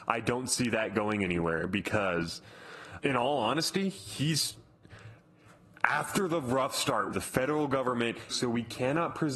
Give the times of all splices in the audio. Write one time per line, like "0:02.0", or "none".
0:03.0
0:07.1
0:08.3